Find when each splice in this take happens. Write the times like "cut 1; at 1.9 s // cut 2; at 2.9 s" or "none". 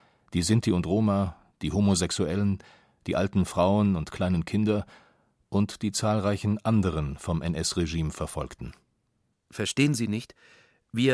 cut 1; at 9.3 s